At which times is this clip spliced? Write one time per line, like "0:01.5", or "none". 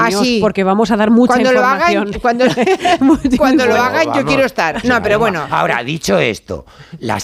0:04.8